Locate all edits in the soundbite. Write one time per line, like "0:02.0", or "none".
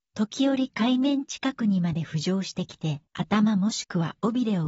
0:03.1